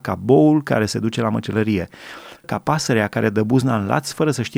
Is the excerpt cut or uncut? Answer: cut